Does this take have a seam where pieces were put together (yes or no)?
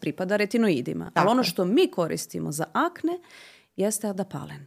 no